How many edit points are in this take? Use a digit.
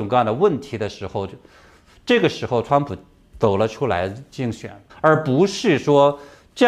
1